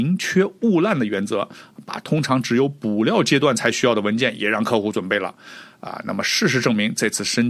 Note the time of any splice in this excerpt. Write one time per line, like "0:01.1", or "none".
none